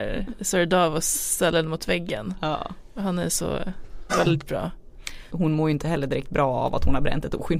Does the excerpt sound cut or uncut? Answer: cut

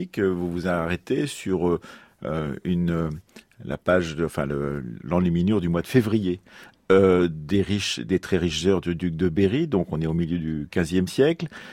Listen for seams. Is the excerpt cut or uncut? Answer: uncut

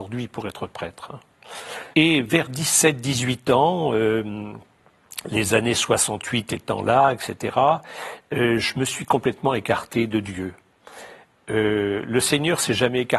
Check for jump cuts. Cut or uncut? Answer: cut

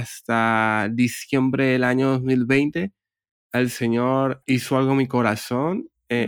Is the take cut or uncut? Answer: cut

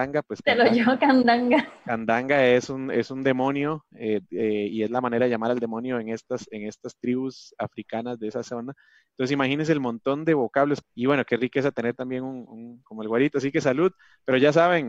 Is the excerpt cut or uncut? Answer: cut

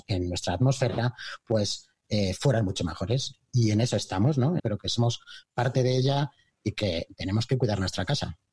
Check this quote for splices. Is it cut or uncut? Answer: cut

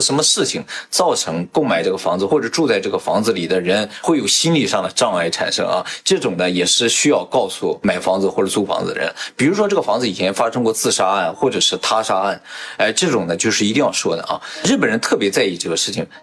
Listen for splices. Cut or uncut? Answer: uncut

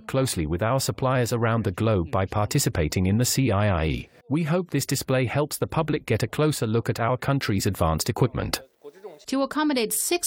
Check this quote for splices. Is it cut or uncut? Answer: cut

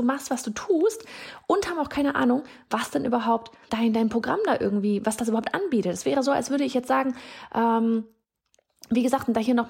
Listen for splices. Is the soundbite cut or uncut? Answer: cut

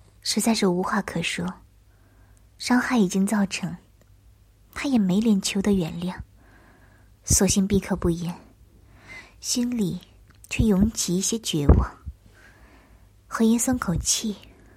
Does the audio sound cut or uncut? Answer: uncut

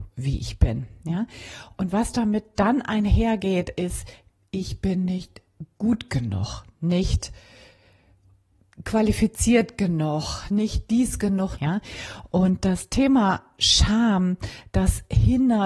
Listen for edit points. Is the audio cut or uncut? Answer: cut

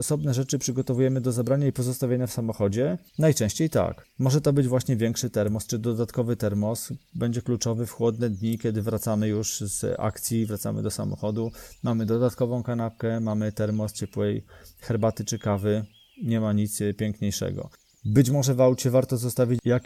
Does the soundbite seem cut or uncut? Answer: uncut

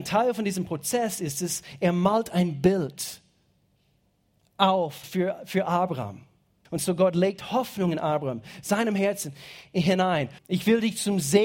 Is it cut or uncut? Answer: cut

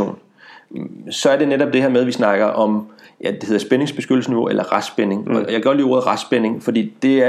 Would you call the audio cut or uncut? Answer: uncut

